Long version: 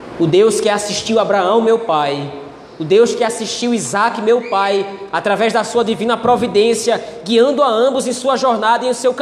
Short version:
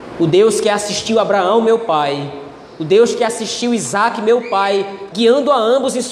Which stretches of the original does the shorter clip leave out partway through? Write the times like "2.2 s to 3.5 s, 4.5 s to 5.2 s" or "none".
5.1 s to 7.2 s